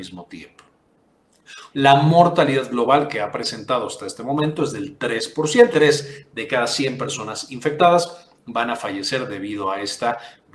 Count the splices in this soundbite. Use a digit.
2